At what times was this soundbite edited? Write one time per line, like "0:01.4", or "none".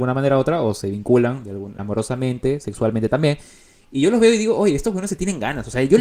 0:01.8